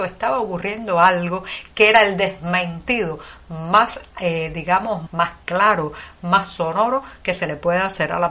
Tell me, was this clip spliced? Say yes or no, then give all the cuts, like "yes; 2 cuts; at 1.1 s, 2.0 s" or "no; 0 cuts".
yes; 1 cut; at 5.1 s